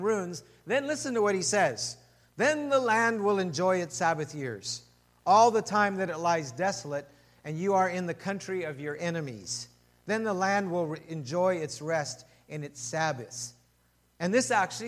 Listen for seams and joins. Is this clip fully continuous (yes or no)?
yes